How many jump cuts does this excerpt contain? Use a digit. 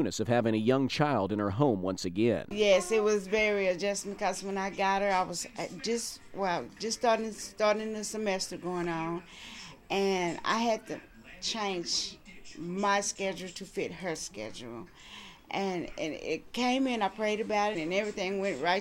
1